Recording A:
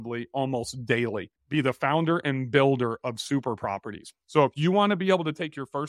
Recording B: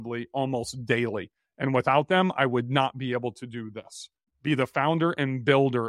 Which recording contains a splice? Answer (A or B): A